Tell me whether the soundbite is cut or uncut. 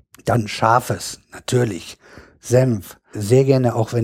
cut